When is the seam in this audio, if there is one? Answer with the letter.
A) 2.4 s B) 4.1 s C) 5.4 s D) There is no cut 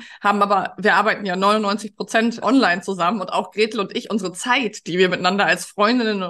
A